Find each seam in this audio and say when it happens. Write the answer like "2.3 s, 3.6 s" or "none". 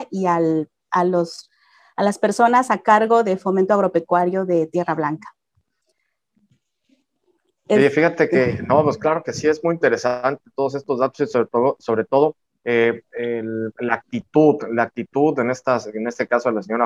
none